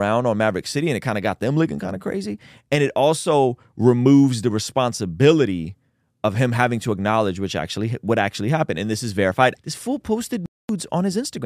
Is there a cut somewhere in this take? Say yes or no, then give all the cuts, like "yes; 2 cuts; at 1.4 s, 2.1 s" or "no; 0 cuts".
yes; 1 cut; at 9.5 s